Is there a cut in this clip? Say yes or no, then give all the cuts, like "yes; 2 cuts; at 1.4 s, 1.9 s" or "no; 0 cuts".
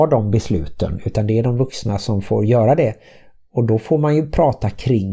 no; 0 cuts